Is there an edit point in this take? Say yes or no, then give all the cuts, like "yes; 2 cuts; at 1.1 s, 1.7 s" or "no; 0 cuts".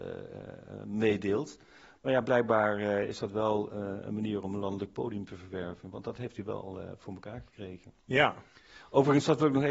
no; 0 cuts